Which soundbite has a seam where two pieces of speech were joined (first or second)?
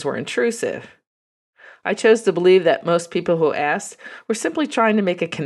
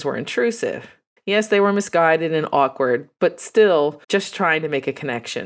second